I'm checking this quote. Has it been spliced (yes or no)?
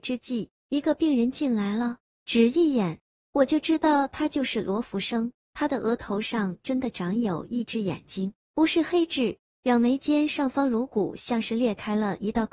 no